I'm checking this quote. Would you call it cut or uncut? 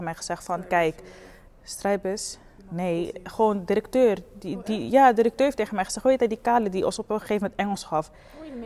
uncut